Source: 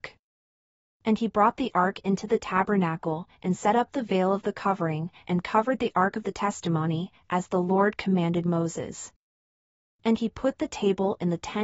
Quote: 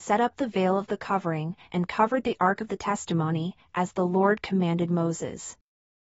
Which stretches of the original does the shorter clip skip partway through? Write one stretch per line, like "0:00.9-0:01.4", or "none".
none

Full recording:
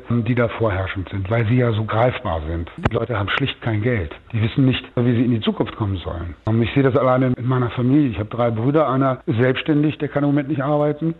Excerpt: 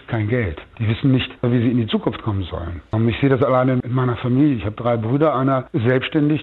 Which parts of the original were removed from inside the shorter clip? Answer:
none

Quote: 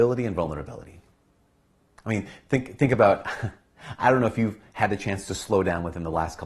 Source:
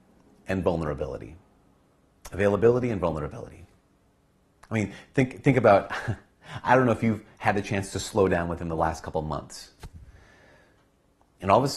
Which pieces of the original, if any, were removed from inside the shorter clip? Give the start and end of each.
none

